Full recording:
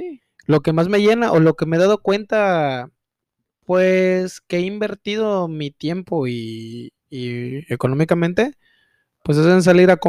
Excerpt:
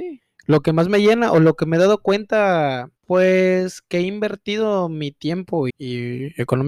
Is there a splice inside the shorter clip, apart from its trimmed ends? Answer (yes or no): yes